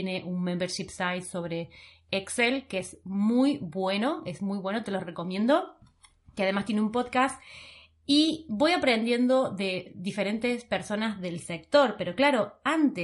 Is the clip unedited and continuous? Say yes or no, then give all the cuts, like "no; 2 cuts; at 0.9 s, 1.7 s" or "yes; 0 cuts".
yes; 0 cuts